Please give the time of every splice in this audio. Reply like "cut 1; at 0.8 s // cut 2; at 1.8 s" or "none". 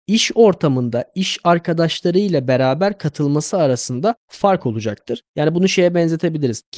cut 1; at 5.3 s